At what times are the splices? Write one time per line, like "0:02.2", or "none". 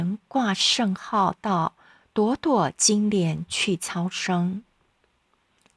none